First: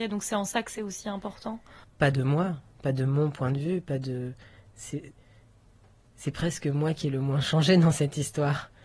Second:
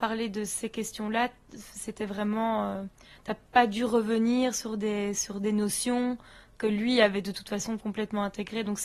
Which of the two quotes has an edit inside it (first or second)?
first